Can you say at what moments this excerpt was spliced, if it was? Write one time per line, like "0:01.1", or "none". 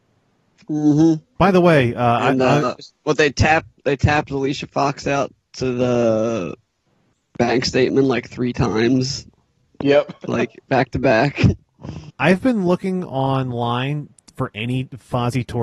0:01.4
0:02.8
0:12.1